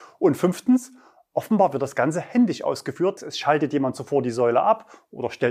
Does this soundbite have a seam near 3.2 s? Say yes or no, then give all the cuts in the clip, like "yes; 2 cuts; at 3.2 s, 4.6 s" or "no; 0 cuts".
yes; 1 cut; at 3.2 s